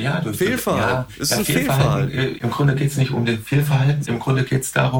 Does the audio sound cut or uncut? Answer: cut